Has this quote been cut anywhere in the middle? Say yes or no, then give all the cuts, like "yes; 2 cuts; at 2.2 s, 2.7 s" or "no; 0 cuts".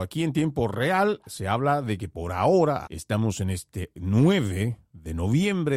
yes; 1 cut; at 2.9 s